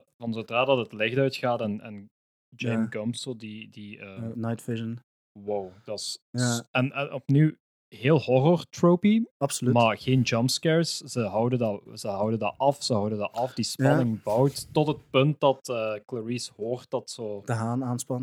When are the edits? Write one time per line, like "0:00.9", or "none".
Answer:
none